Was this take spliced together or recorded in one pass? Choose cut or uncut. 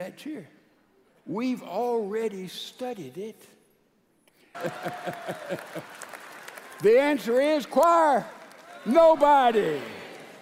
cut